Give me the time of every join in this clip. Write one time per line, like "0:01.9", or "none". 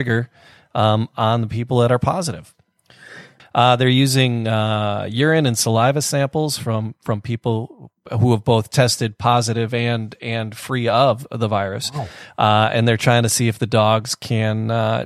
0:03.4